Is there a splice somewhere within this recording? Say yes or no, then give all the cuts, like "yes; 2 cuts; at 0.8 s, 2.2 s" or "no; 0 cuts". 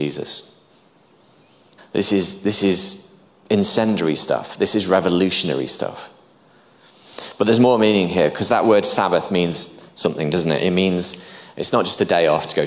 yes; 1 cut; at 1.8 s